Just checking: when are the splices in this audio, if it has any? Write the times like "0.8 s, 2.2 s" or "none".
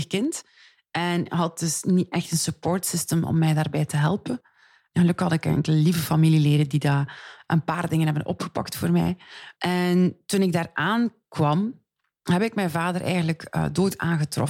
9.5 s